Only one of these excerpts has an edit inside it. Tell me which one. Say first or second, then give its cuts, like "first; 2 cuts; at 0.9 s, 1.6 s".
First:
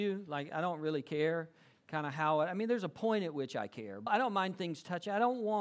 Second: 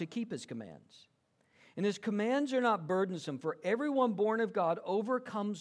first; 1 cut; at 4.1 s